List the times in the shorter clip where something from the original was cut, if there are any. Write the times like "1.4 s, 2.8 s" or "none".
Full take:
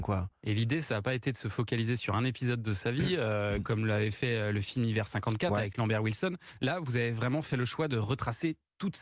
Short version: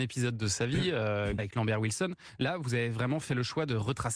1.4 s